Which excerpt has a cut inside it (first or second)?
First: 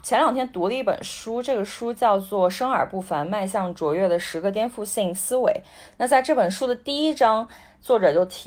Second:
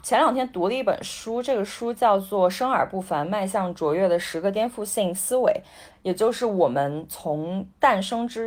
second